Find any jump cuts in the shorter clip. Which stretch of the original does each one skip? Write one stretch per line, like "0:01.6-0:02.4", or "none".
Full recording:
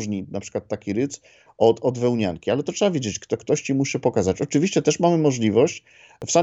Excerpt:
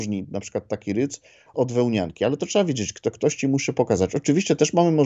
0:01.5-0:01.8